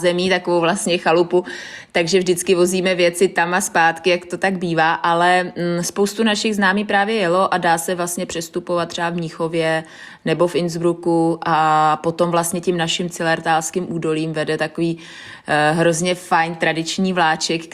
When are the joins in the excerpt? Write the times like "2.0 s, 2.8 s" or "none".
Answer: none